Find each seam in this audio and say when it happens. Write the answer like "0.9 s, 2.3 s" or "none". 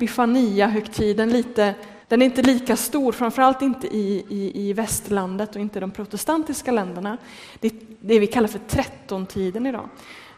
2.0 s